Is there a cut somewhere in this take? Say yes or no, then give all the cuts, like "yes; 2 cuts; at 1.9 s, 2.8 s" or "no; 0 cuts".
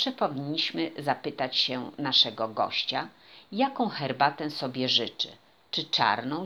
no; 0 cuts